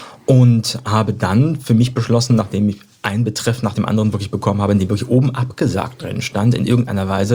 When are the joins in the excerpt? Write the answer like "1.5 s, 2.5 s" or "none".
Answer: none